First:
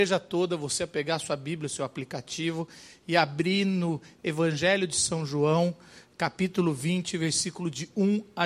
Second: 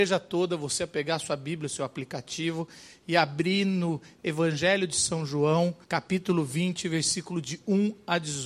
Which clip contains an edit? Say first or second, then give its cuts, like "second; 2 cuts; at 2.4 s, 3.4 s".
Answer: second; 1 cut; at 5.8 s